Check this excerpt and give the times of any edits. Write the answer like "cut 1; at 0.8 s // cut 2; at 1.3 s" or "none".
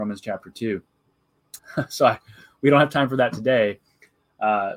cut 1; at 1.6 s